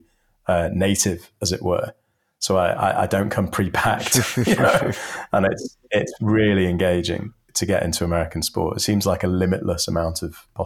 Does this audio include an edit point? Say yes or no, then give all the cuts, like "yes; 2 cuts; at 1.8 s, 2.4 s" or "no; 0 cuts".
yes; 1 cut; at 7.5 s